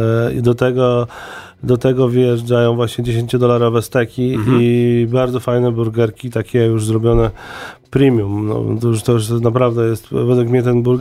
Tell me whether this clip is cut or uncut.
uncut